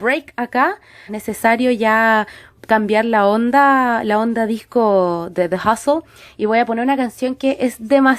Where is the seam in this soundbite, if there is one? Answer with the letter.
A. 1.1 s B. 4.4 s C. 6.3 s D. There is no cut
A